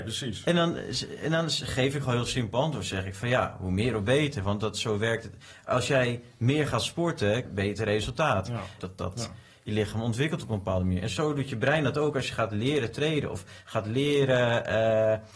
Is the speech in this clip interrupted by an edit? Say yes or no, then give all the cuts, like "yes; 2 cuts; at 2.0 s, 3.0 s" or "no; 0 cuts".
yes; 2 cuts; at 7.4 s, 8.8 s